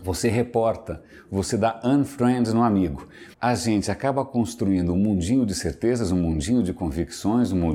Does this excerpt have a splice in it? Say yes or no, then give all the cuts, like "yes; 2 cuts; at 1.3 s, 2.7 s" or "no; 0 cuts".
yes; 1 cut; at 3.3 s